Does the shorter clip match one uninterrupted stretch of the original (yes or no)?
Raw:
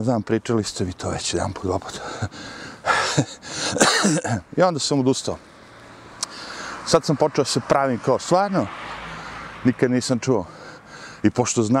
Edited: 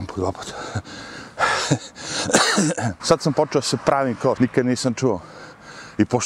no